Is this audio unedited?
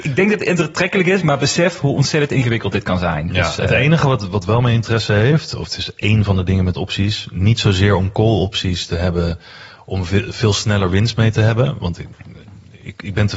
yes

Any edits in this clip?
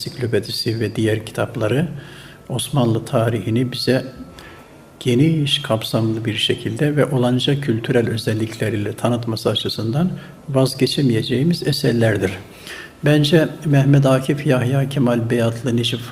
no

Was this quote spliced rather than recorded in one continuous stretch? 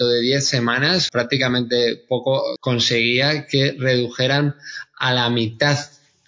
yes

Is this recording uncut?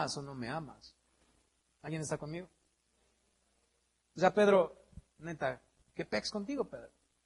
yes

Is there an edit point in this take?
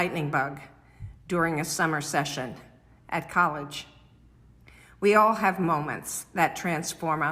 no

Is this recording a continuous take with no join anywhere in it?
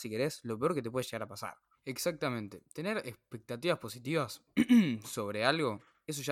no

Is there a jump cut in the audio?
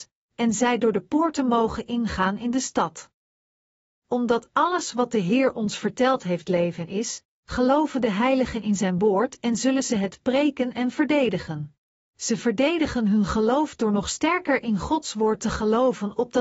yes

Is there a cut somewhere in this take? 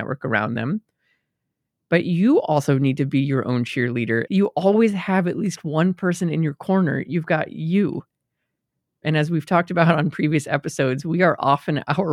yes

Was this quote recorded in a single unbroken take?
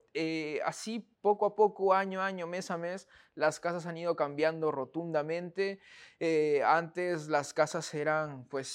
no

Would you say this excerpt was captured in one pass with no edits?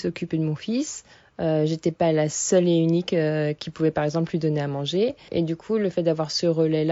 yes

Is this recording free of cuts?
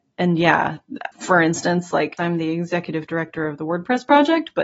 no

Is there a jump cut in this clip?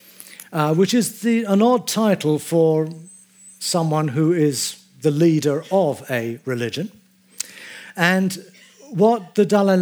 no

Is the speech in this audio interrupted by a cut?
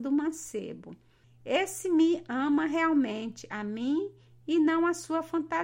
yes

